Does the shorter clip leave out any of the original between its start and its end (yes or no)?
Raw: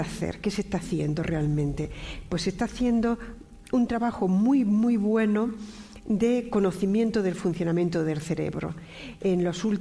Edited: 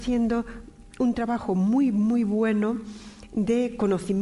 no